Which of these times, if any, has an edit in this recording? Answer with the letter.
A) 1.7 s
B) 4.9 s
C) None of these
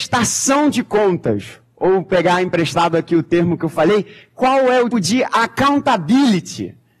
B